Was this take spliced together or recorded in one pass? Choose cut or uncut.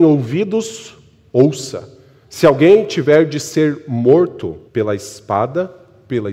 cut